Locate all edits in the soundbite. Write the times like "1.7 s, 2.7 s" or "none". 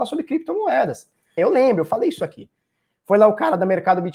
1.4 s

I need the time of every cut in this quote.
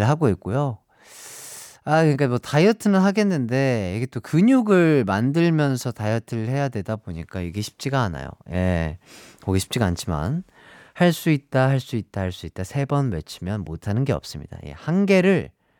none

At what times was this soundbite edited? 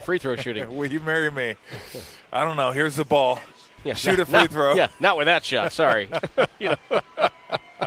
none

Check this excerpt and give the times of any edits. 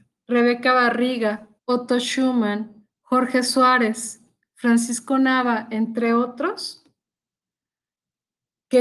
1.6 s, 2.9 s

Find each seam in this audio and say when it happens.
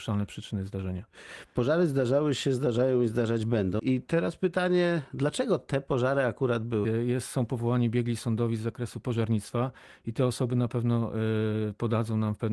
3.8 s, 6.8 s

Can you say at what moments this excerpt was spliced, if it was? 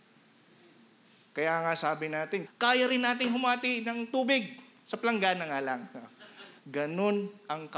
2.5 s, 6.6 s

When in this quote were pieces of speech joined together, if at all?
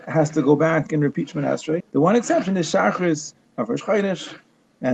1.8 s

